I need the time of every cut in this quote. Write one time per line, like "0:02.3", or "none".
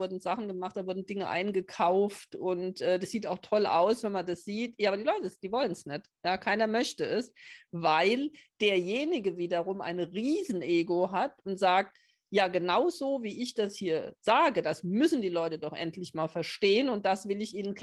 none